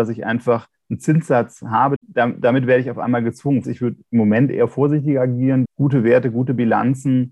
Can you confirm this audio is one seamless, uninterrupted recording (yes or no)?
no